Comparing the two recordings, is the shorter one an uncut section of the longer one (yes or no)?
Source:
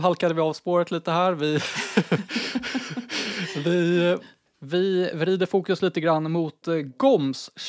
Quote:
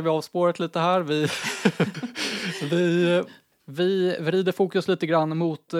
no